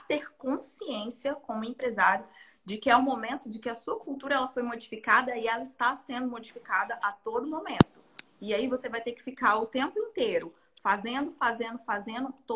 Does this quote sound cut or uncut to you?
uncut